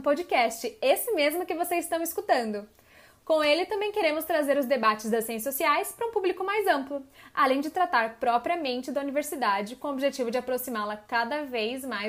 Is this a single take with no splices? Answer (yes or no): yes